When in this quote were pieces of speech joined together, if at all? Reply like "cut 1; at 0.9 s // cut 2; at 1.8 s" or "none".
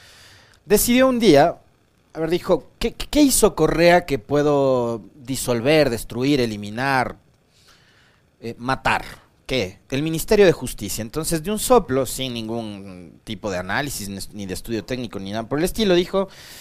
none